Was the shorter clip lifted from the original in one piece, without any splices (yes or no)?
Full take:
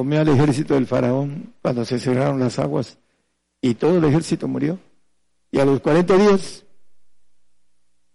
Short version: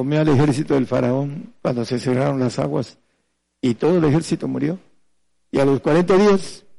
yes